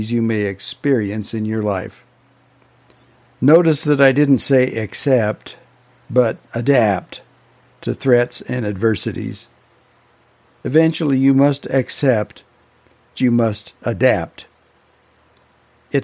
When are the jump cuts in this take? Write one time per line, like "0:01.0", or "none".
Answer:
0:13.1